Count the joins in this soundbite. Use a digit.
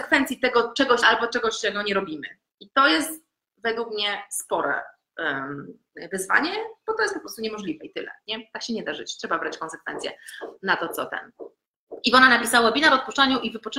1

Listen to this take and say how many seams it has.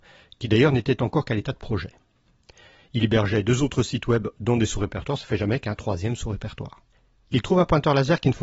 0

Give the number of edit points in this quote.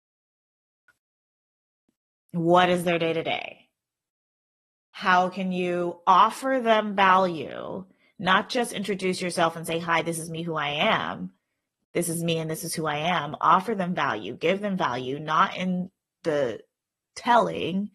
0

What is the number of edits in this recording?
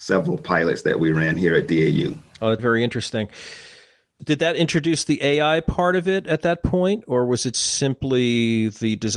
2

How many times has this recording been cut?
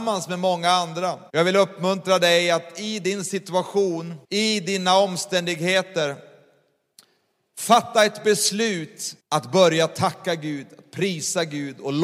3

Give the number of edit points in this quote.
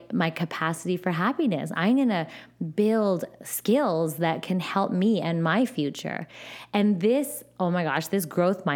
1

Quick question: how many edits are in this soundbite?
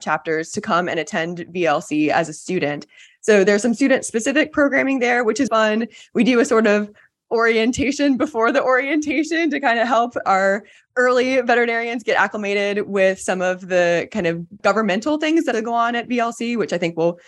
2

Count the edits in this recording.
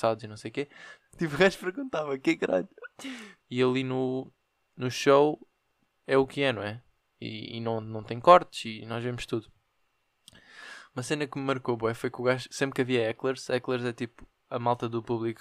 2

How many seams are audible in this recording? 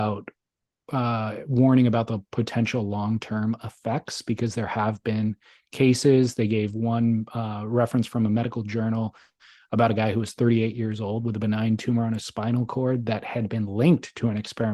0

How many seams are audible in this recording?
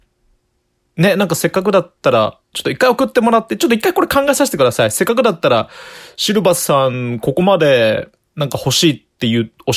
0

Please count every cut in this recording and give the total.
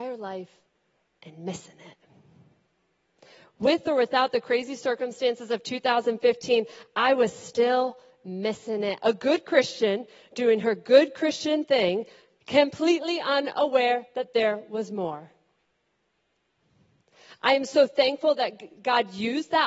1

